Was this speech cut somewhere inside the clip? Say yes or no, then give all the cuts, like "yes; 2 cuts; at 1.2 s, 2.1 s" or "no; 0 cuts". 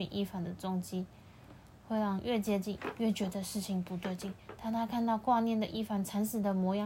no; 0 cuts